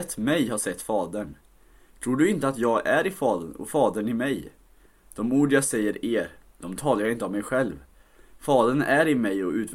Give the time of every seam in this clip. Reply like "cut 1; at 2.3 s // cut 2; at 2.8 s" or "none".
cut 1; at 1.9 s